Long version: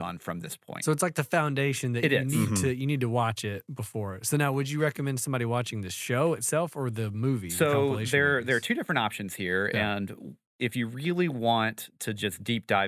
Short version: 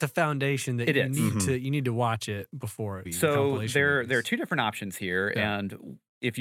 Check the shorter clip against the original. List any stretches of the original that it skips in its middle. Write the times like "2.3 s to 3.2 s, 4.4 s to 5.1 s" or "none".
4.2 s to 7.4 s